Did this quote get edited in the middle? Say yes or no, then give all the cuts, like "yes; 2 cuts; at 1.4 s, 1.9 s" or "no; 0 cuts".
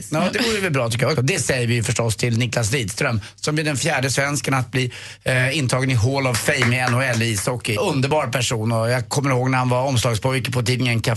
yes; 2 cuts; at 1.2 s, 7.8 s